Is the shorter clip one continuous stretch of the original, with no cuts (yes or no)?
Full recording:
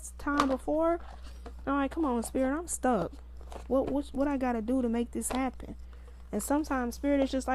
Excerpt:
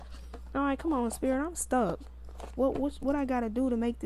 yes